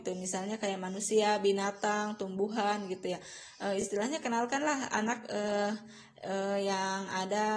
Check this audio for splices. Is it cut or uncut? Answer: uncut